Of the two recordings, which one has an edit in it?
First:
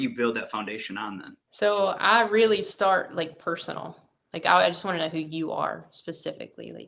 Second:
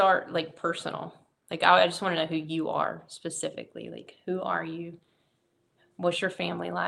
first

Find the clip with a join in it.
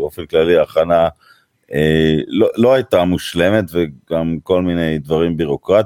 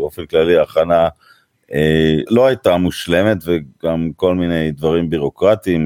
second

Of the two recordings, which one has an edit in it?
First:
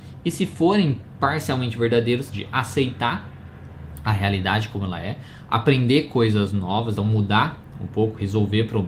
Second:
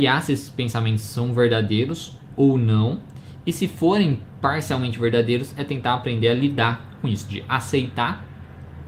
first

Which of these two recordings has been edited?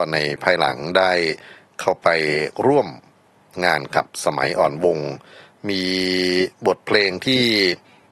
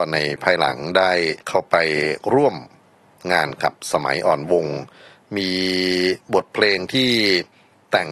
second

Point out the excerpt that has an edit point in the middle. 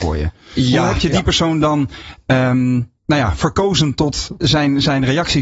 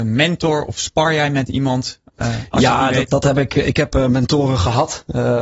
first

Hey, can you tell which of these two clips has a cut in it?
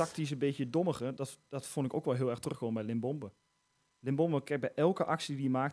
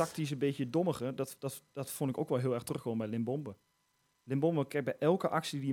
first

